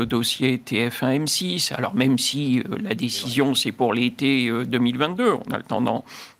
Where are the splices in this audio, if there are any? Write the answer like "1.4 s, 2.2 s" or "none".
none